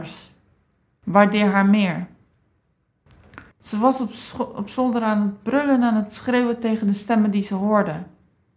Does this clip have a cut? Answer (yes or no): yes